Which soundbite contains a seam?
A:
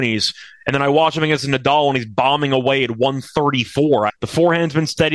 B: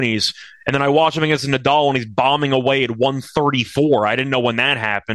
A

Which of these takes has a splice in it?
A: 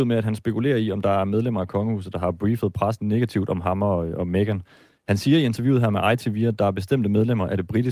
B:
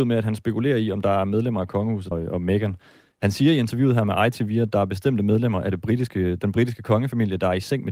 B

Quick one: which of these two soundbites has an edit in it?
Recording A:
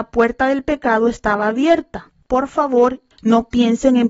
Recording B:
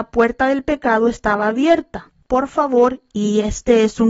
A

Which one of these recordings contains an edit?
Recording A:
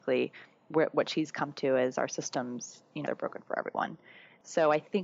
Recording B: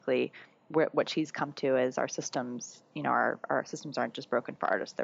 A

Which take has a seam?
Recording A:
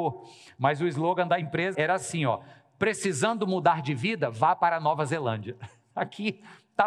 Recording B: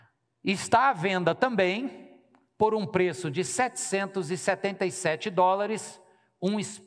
A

